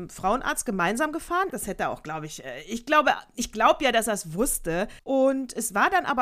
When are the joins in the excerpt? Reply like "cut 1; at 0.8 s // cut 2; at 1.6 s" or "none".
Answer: cut 1; at 1.5 s // cut 2; at 5.0 s